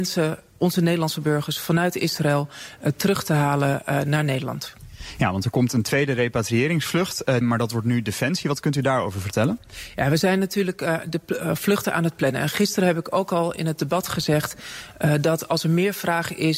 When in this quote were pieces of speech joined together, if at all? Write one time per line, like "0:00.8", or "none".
0:07.4